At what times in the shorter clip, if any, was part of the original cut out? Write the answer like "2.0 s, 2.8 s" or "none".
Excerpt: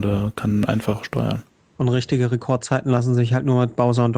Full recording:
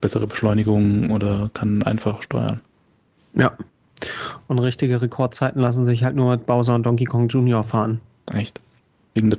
1.8 s